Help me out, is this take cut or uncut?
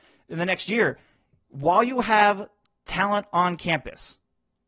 uncut